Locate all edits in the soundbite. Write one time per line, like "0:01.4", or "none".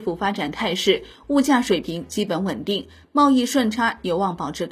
none